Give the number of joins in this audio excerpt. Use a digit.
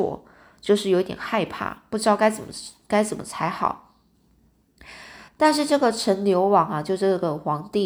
1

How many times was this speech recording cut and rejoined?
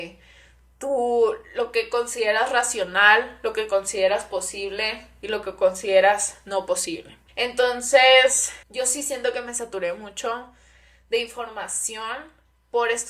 2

